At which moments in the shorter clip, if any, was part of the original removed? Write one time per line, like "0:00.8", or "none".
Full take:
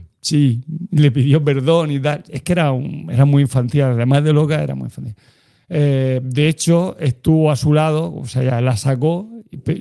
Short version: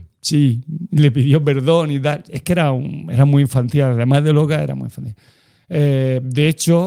none